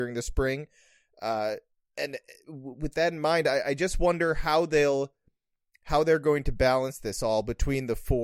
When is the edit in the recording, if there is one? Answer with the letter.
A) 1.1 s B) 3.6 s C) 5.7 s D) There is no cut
D